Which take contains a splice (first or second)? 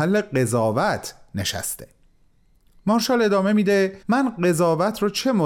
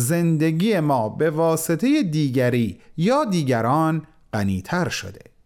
first